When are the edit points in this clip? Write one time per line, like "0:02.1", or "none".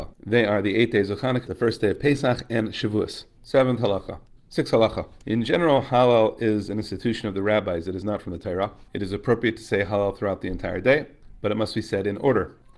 0:01.5
0:04.4
0:08.9